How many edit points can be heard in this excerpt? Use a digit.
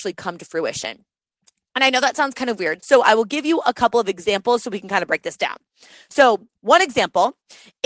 1